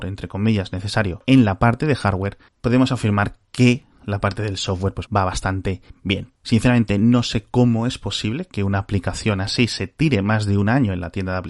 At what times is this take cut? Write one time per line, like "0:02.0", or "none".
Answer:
0:05.1
0:06.4